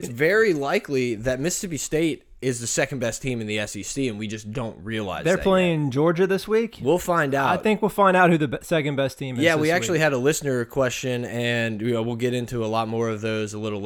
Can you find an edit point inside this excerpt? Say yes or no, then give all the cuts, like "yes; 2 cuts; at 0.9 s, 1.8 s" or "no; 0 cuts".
no; 0 cuts